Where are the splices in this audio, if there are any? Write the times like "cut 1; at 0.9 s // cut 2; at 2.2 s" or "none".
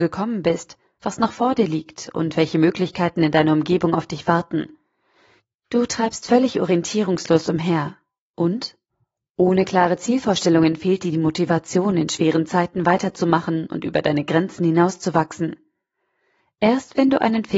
none

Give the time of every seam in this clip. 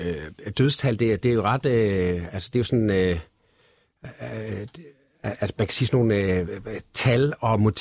none

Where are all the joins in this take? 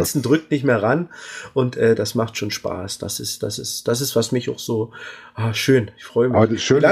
none

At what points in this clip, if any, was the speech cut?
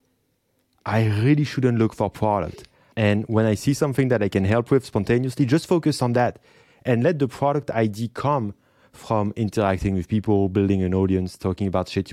cut 1; at 2.9 s

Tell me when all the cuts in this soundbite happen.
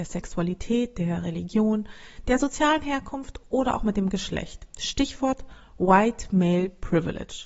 none

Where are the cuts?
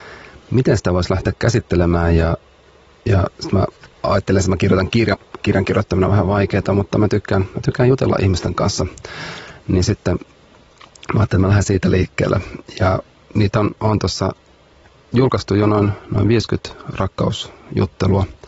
cut 1; at 5.1 s

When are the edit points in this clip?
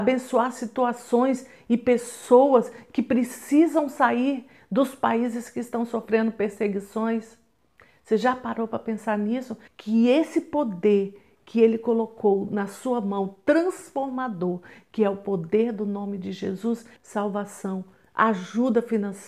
cut 1; at 9.7 s // cut 2; at 17.0 s

